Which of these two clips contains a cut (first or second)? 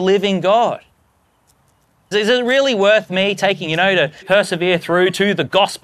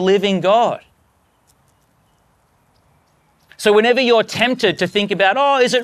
first